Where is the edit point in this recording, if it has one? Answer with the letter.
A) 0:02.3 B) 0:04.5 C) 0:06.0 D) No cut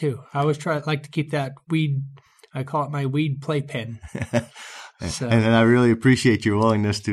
D